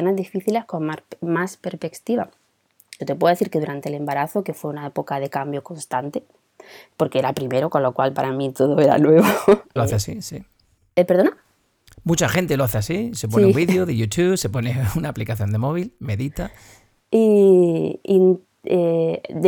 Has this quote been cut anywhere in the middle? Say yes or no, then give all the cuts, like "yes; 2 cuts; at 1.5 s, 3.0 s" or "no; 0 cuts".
yes; 2 cuts; at 3.0 s, 9.8 s